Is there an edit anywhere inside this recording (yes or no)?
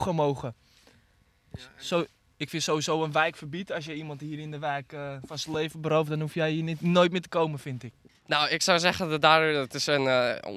no